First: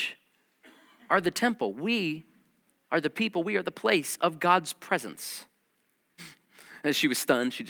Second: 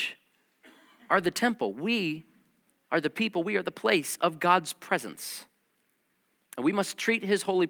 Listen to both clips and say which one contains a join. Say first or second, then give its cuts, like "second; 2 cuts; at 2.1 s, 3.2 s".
first; 1 cut; at 6.2 s